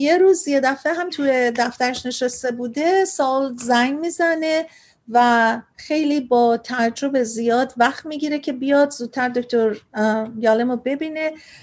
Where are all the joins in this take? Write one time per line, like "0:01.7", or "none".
0:01.1